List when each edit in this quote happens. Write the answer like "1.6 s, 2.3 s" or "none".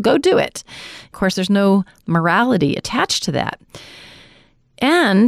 none